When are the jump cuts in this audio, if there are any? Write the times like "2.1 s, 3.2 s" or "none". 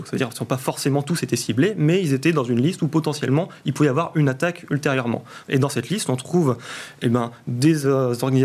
none

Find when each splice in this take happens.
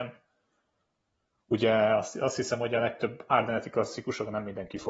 none

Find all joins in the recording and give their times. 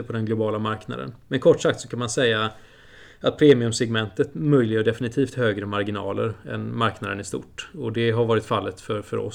1.2 s

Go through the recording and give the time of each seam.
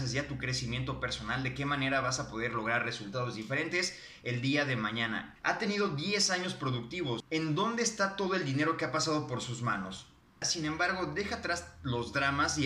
5.4 s, 10.4 s

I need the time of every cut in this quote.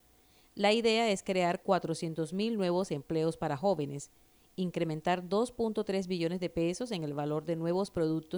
none

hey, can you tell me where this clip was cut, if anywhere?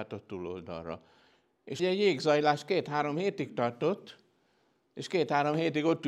1.8 s

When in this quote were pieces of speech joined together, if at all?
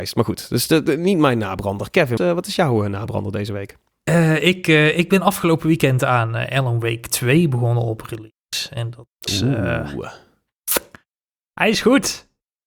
2.2 s

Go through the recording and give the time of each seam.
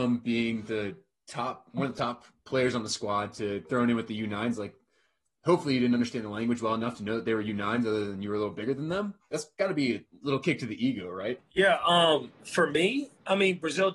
9.2 s, 11.4 s

